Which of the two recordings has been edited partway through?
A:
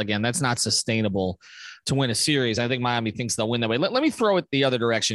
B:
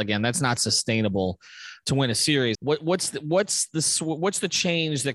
B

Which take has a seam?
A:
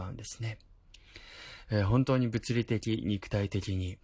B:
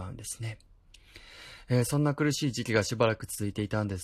A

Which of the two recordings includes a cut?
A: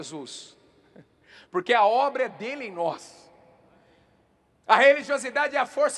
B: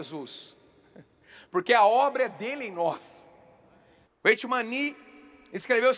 B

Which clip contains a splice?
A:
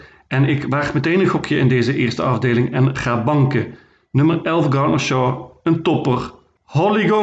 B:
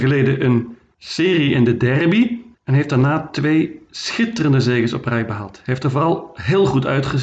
B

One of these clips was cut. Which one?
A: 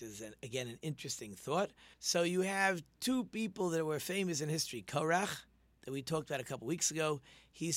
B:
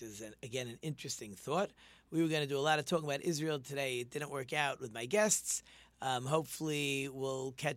A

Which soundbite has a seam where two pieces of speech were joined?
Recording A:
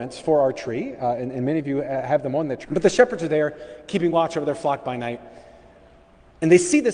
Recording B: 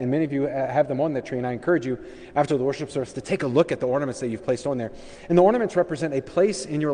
A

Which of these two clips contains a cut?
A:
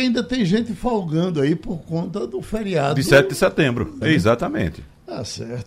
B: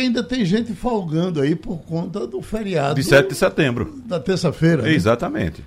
A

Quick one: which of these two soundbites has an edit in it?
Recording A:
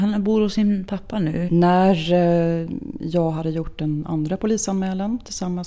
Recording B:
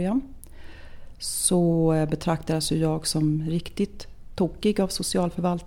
A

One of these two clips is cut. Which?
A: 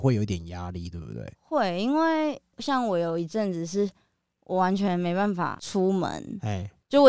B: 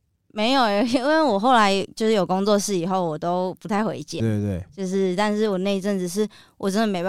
B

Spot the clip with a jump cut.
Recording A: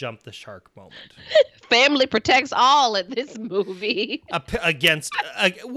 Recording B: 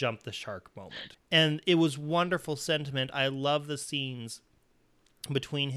B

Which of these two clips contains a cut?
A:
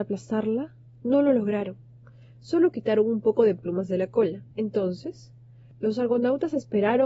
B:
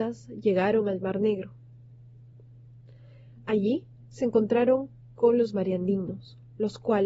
A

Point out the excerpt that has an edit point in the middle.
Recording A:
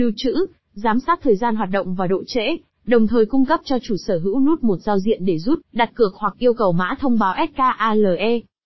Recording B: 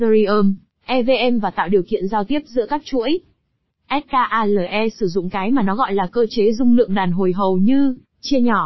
A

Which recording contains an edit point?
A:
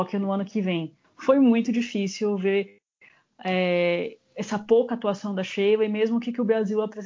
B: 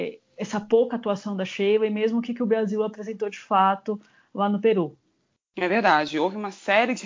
A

